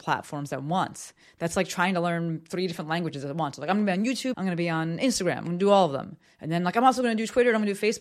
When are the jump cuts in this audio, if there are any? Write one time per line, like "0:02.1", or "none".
0:04.3